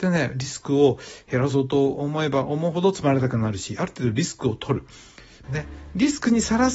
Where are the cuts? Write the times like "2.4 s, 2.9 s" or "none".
5.4 s